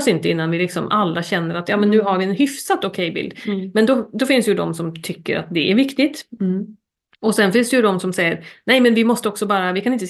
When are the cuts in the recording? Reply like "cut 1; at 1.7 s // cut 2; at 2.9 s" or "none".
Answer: none